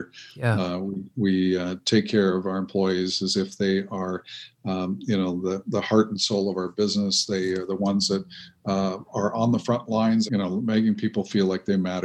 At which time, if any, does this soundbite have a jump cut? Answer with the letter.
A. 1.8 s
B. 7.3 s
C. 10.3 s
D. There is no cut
C